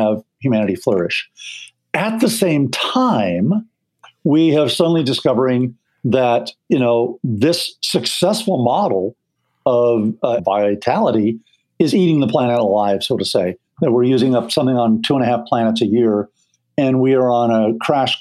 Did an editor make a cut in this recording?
yes; 1 cut; at 10.4 s

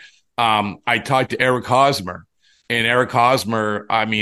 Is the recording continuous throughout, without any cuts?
yes; 0 cuts

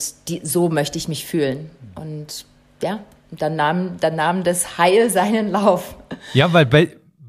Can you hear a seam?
no; 0 cuts

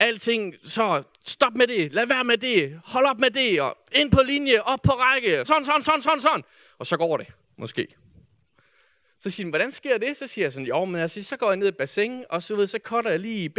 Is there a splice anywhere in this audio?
yes; 2 cuts; at 5.4 s, 9.0 s

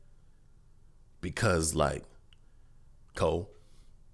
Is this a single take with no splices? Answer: no; 1 cut; at 3.1 s

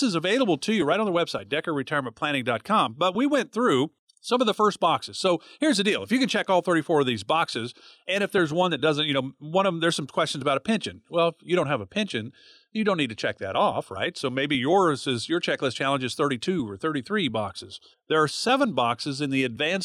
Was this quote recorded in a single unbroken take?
no; 1 cut; at 17.9 s

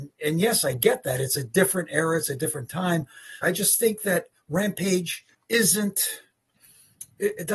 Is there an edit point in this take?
yes; 2 cuts; at 3.4 s, 5.3 s

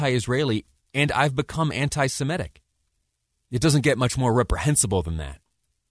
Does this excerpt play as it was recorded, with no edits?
no; 1 cut; at 3.4 s

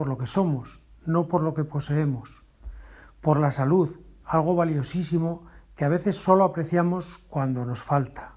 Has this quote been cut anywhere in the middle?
no; 0 cuts

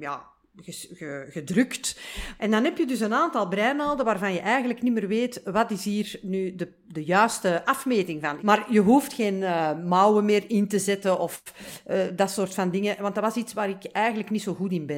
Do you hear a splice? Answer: yes; 2 cuts; at 2.4 s, 8.4 s

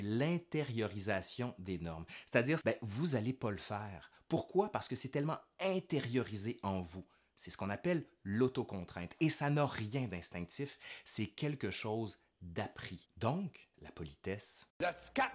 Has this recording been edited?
yes; 2 cuts; at 2.6 s, 13.7 s

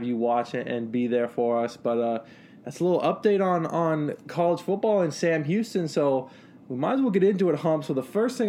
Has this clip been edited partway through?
no; 0 cuts

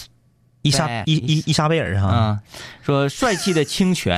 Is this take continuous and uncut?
no; 1 cut; at 1.0 s

